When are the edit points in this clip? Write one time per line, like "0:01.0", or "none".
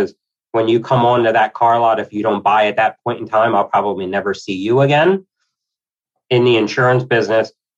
none